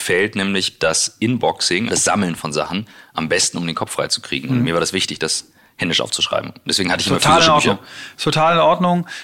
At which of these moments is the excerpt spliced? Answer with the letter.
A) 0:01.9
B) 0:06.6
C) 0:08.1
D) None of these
A